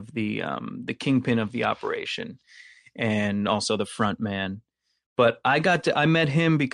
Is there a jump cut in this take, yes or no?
no